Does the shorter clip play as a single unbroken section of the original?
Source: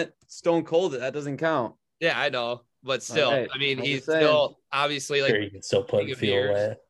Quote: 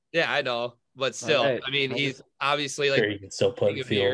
no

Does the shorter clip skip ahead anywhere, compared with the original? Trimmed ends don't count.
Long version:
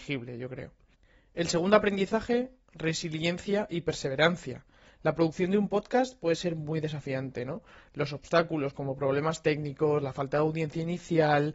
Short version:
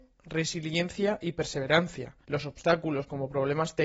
yes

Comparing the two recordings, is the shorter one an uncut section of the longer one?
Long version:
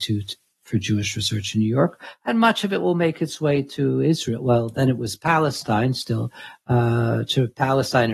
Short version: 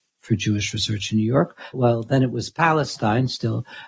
no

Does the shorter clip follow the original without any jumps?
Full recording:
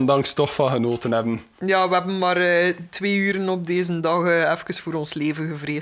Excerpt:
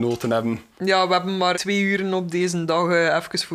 no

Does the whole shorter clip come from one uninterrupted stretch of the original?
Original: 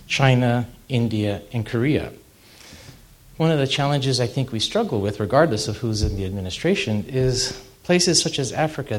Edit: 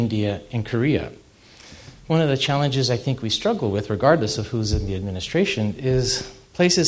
no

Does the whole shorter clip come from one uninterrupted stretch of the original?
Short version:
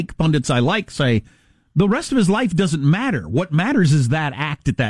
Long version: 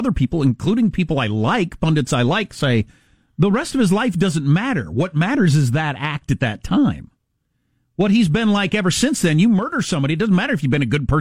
yes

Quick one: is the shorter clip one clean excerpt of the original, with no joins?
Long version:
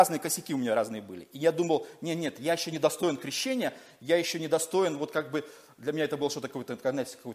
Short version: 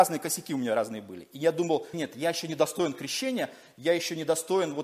no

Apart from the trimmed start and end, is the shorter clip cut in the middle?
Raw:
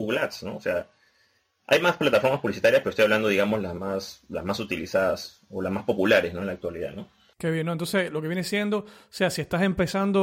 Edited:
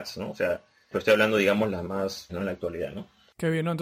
yes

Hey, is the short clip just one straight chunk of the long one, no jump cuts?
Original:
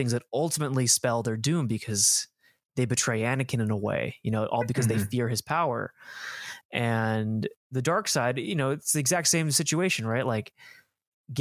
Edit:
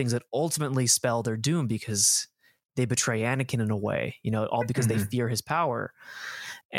yes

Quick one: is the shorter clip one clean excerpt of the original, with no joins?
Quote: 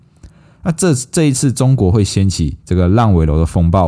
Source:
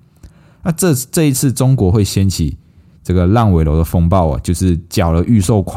no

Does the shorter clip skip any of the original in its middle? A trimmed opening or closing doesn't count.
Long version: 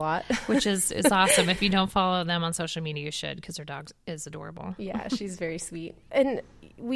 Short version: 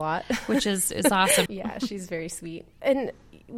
yes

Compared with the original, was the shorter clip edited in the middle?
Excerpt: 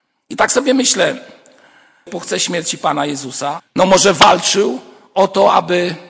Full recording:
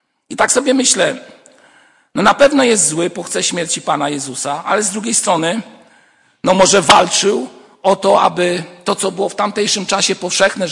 yes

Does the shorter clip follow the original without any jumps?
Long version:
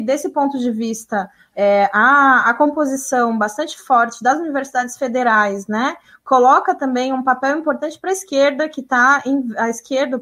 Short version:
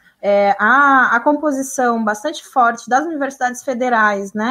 yes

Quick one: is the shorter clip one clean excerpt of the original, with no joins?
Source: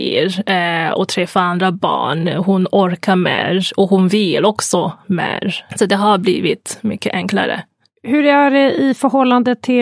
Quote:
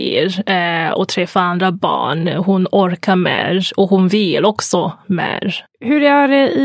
no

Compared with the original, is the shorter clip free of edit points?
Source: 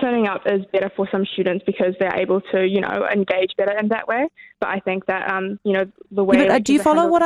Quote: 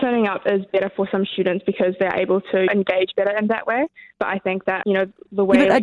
no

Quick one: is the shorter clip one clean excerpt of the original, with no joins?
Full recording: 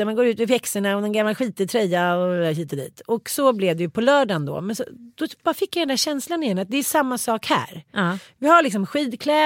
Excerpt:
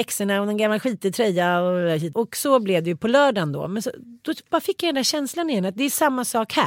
no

